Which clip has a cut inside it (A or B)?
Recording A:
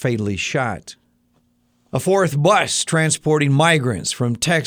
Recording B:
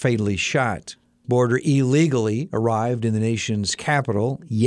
B